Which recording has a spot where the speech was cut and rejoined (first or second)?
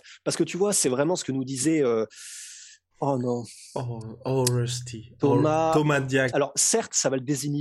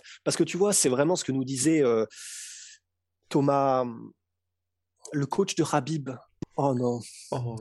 first